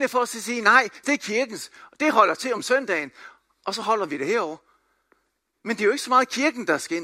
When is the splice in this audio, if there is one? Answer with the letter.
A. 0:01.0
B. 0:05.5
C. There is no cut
A